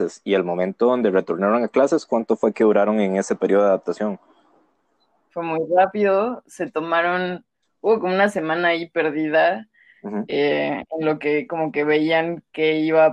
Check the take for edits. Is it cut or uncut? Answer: cut